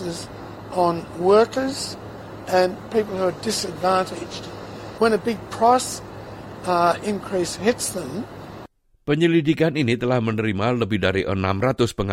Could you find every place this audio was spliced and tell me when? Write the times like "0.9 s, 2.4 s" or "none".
5.0 s